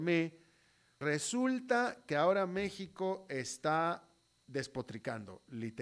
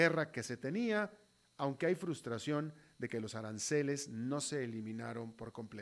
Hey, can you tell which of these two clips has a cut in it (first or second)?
first